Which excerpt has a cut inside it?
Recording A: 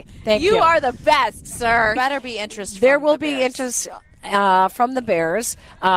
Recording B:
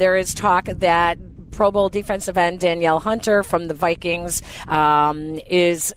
A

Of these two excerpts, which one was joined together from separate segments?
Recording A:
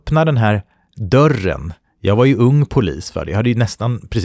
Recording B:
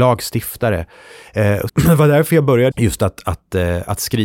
B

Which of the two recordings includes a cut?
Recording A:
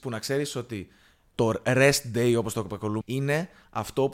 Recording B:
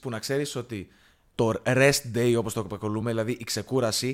A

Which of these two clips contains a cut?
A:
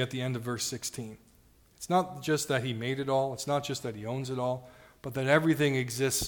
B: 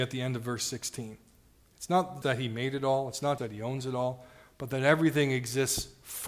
B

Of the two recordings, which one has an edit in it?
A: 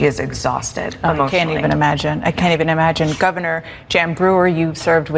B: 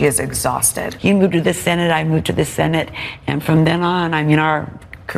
B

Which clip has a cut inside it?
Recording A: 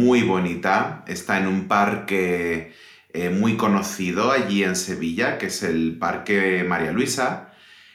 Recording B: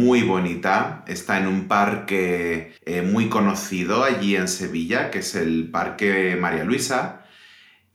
B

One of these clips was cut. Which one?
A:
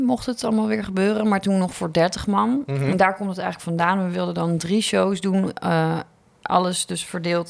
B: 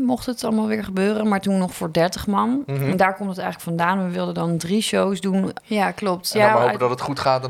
B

